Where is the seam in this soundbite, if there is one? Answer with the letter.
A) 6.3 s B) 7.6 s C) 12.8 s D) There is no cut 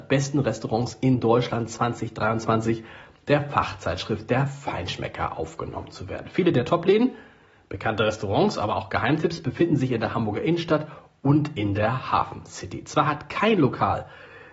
D